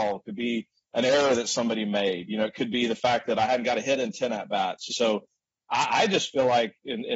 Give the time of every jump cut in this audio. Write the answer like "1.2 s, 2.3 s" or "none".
4.9 s